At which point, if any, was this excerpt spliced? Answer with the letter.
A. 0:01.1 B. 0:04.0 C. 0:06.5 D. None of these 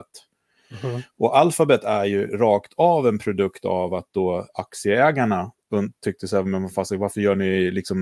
C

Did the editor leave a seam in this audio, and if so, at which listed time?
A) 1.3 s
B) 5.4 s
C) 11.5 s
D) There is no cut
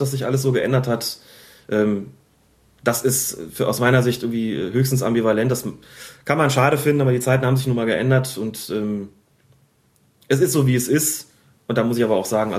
D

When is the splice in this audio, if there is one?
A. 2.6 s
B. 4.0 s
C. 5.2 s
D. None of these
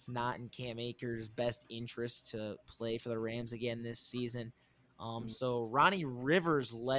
D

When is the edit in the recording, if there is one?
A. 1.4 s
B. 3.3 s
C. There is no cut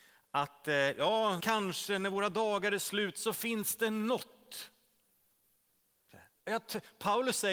A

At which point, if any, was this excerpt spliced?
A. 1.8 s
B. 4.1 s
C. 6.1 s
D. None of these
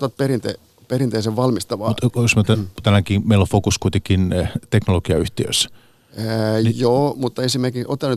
D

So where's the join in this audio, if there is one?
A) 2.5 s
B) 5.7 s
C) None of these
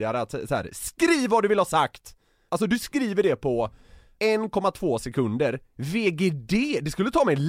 A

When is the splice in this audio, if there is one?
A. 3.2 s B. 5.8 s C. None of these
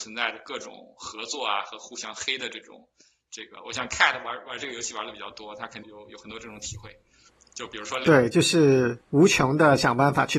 B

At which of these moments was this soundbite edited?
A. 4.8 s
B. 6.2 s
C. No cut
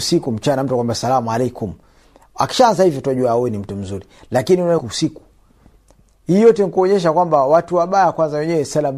A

